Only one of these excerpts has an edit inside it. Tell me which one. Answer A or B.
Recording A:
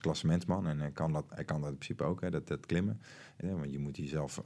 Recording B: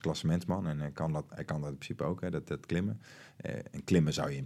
A